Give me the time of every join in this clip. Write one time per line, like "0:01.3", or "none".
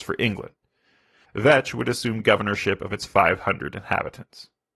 0:01.2